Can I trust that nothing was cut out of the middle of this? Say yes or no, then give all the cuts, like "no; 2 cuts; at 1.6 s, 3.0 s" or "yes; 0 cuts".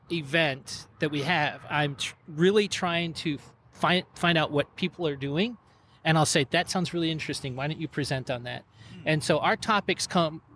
yes; 0 cuts